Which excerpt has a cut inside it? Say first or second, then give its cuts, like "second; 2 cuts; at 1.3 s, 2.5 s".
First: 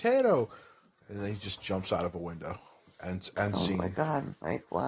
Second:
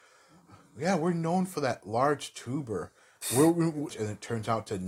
second; 1 cut; at 3.9 s